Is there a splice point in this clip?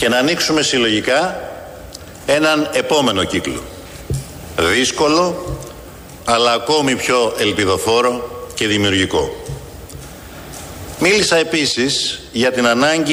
yes; 1 cut; at 6.2 s

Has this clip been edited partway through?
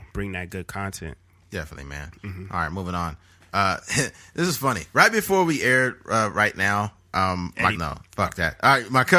yes; 1 cut; at 7.7 s

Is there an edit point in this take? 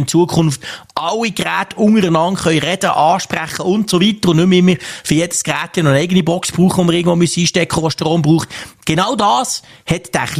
no; 0 cuts

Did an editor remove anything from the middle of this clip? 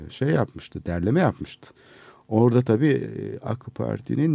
no; 0 cuts

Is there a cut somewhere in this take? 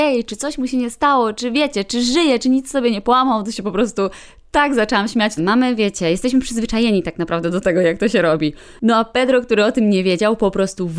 yes; 1 cut; at 5.4 s

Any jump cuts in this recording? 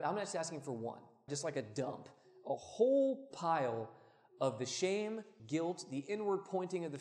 yes; 2 cuts; at 1.3 s, 5.4 s

